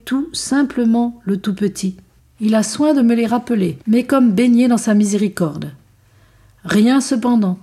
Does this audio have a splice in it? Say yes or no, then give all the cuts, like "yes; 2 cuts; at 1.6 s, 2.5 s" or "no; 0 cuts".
yes; 2 cuts; at 2.2 s, 3.8 s